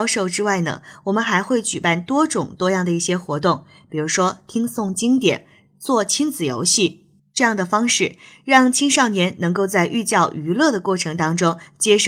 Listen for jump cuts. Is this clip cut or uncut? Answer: uncut